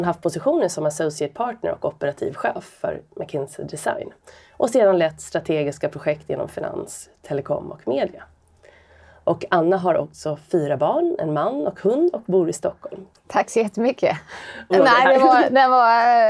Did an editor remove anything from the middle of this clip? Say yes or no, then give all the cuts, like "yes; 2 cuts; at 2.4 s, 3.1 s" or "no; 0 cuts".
yes; 2 cuts; at 13.1 s, 14.7 s